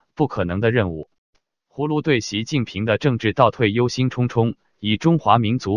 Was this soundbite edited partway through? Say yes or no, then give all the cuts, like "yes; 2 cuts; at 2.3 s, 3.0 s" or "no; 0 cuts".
yes; 2 cuts; at 1.5 s, 4.7 s